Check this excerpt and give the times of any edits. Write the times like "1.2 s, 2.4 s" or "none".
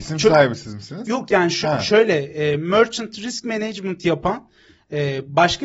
none